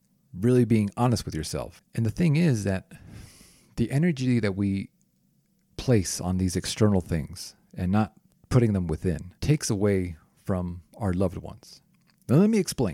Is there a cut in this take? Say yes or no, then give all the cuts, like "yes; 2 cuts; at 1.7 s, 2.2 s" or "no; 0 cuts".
yes; 2 cuts; at 1.8 s, 9.4 s